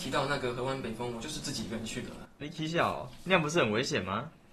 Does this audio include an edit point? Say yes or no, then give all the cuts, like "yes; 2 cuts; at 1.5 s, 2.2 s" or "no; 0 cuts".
yes; 1 cut; at 2.4 s